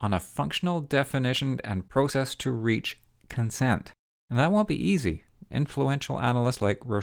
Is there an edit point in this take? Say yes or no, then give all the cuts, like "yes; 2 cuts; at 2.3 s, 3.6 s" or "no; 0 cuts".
no; 0 cuts